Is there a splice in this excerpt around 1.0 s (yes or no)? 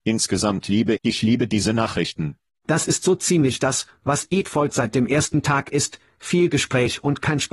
yes